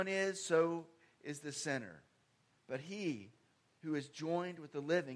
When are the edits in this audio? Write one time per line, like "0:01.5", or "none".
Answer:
0:02.5